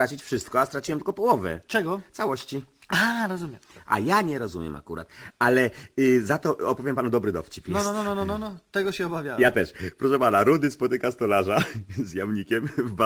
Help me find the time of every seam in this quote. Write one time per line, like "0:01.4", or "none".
none